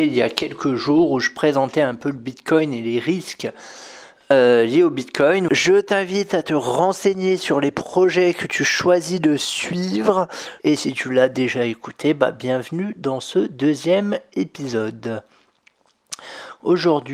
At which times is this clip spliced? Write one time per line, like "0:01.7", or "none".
0:05.5
0:10.6